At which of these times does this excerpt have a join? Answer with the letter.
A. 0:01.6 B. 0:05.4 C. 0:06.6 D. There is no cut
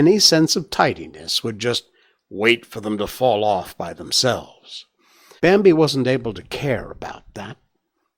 B